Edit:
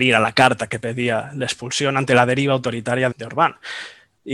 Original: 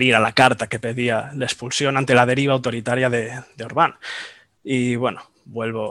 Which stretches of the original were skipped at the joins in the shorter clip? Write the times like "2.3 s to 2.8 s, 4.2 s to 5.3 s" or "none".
3.1 s to 3.5 s